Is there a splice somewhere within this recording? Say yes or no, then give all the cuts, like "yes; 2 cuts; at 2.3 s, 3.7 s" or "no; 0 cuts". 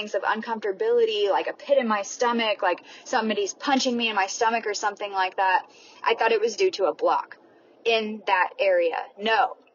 no; 0 cuts